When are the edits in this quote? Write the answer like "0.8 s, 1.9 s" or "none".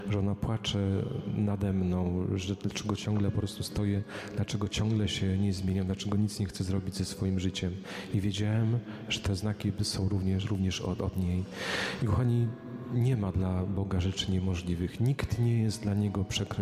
10.4 s